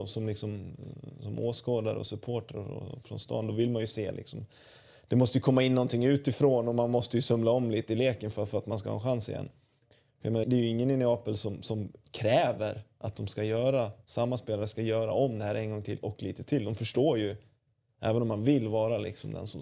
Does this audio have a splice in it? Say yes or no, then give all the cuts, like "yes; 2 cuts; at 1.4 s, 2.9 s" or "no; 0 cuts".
yes; 1 cut; at 10.4 s